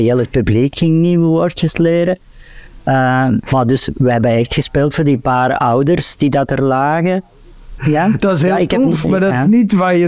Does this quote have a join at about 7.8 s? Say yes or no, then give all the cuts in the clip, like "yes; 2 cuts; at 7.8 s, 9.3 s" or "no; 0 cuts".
yes; 1 cut; at 7.8 s